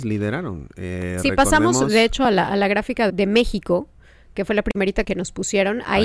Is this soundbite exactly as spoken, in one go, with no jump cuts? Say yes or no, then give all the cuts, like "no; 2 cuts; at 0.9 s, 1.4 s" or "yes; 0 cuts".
no; 2 cuts; at 3.1 s, 5.0 s